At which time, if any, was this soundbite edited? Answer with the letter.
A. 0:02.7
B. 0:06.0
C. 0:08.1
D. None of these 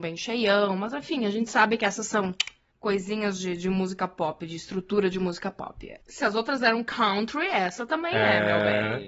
B